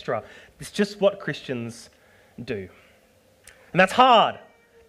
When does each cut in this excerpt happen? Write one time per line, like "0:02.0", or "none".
none